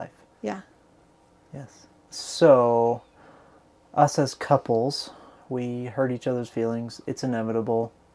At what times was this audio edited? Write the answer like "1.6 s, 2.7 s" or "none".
2.1 s